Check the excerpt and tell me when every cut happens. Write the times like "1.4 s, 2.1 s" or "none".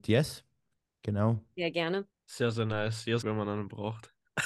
2.1 s, 3.2 s

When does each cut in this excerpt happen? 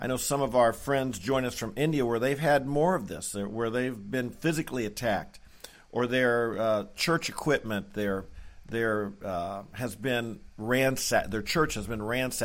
none

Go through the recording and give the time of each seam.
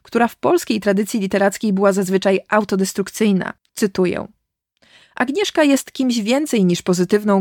3.7 s

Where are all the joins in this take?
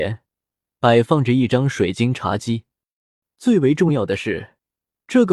3.2 s

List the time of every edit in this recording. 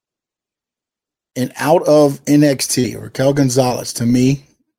1.3 s

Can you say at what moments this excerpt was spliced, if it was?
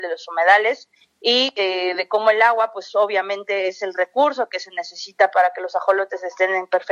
none

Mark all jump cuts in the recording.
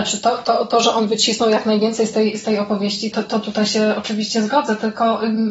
3.1 s

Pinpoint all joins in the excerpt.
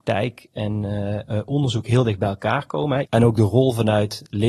3.1 s

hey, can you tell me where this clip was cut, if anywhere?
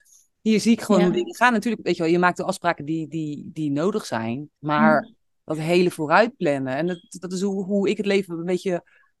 4.5 s, 7.2 s

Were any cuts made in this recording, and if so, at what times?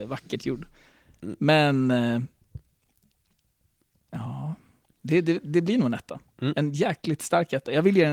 none

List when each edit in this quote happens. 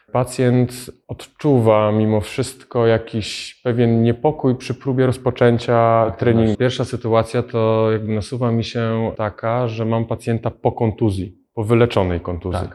6.5 s

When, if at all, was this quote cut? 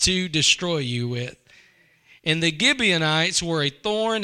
none

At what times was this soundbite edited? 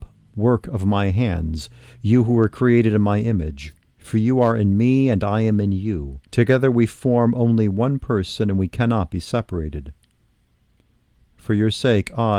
3.9 s, 6.3 s

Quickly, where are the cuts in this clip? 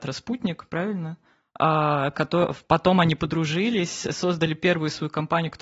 none

